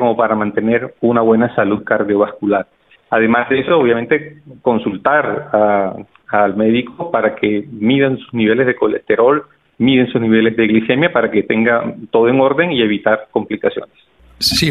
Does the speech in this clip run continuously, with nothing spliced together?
yes; 0 cuts

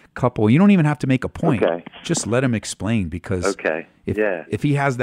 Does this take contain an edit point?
no; 0 cuts

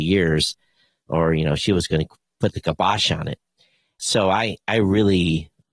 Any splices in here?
no; 0 cuts

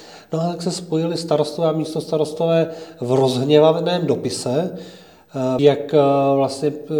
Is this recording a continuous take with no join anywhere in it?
no; 1 cut; at 5.6 s

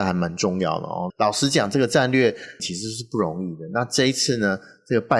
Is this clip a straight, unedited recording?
no; 2 cuts; at 1.1 s, 2.6 s

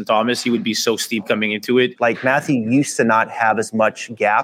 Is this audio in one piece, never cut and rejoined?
no; 1 cut; at 2.0 s

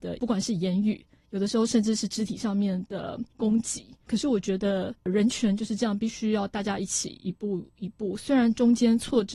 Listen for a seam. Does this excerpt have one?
no; 0 cuts

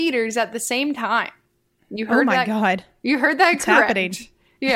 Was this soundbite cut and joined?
no; 0 cuts

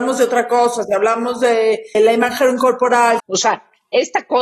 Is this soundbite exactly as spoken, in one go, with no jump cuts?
no; 2 cuts; at 1.9 s, 3.2 s

